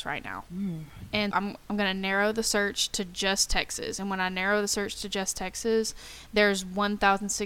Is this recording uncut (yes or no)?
no